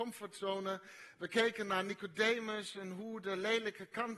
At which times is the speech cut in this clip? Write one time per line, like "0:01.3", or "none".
none